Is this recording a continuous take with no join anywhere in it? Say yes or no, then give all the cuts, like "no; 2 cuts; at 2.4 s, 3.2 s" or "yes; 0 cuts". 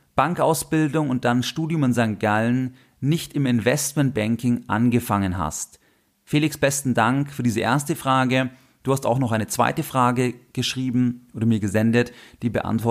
yes; 0 cuts